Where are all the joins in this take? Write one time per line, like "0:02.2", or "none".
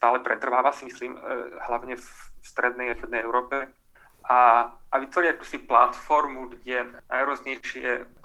none